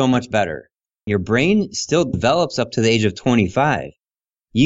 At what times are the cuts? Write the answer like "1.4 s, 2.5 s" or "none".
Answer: 1.1 s